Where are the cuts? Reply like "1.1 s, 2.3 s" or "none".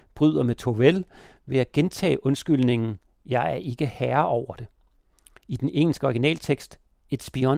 none

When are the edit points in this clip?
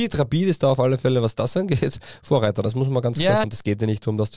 3.4 s

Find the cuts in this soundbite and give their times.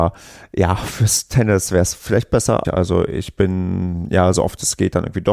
2.6 s

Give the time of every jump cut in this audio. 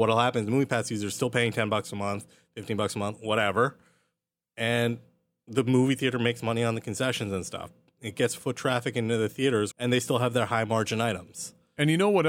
9.7 s

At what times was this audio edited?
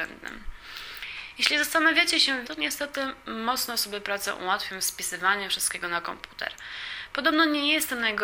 2.4 s

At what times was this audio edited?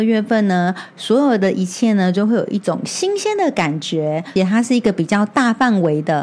4.4 s

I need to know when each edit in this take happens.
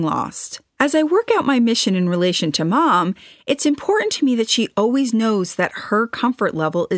none

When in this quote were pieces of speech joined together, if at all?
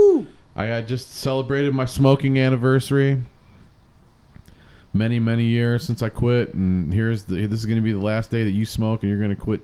none

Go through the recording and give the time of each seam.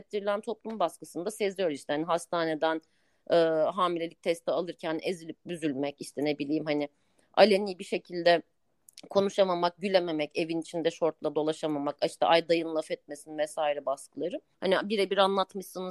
14.5 s

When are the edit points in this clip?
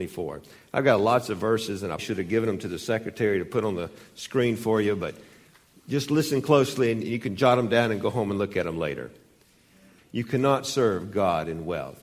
2.0 s, 10.0 s

